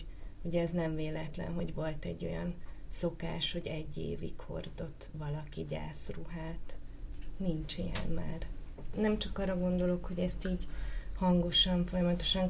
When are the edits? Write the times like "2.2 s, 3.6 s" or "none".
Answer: none